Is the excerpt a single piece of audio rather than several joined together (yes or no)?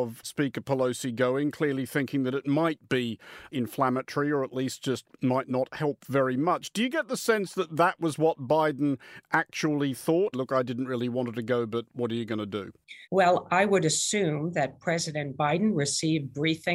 no